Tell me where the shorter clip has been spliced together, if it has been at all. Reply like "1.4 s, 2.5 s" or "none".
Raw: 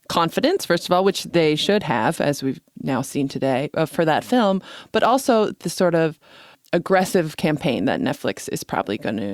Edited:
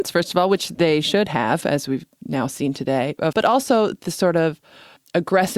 3.3 s